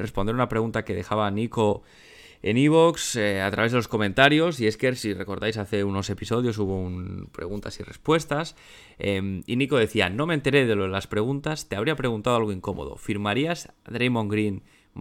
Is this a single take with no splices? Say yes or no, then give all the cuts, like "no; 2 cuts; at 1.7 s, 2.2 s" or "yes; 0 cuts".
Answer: yes; 0 cuts